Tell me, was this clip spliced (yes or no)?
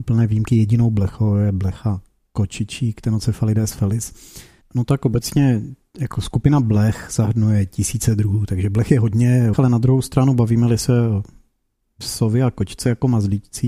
yes